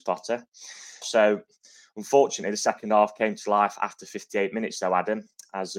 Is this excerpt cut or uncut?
cut